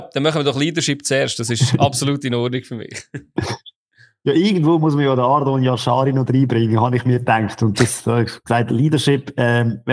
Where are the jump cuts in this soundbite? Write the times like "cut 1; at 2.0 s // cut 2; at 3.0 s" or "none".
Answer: none